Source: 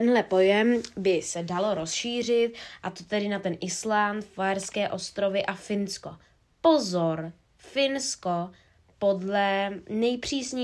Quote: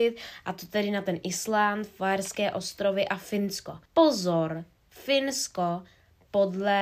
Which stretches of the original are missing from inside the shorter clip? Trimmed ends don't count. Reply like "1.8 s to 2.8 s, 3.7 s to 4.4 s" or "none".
6.2 s to 6.5 s